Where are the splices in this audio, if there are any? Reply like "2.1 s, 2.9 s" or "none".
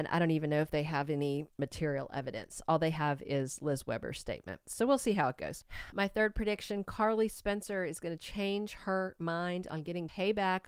none